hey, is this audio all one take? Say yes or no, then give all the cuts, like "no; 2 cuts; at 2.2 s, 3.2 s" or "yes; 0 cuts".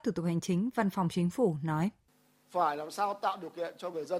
yes; 0 cuts